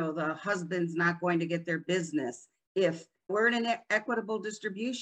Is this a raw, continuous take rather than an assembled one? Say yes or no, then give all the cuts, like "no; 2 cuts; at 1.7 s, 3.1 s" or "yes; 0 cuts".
no; 1 cut; at 3.3 s